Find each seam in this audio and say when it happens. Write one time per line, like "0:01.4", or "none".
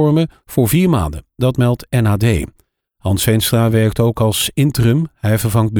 none